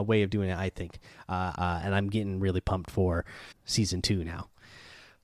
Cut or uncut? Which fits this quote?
cut